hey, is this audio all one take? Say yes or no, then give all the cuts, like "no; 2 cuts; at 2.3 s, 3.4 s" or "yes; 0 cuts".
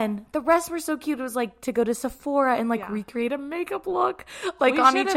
yes; 0 cuts